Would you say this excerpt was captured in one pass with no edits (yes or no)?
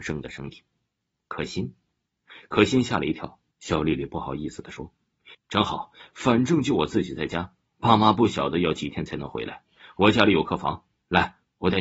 no